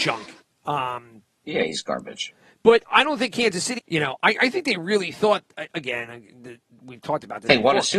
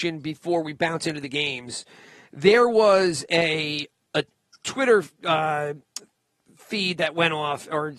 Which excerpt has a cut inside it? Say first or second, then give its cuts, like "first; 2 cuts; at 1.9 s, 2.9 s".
first; 1 cut; at 3.8 s